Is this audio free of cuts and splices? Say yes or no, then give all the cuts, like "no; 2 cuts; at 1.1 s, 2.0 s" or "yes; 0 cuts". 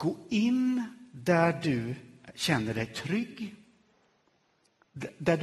yes; 0 cuts